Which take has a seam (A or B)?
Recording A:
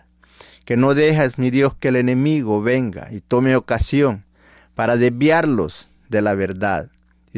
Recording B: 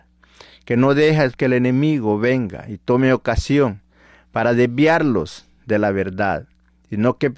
B